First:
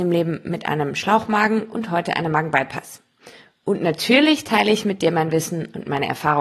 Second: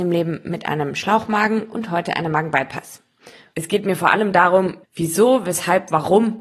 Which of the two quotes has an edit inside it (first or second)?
second